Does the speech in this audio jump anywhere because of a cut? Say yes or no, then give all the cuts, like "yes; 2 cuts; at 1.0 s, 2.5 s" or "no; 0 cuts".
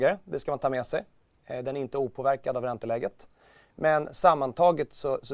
no; 0 cuts